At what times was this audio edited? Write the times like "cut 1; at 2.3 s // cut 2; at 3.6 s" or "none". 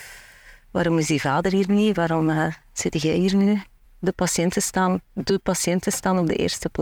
cut 1; at 3.8 s